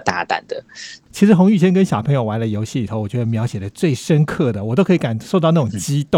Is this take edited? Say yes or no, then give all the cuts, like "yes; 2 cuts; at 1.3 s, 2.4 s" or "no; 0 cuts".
yes; 1 cut; at 1.0 s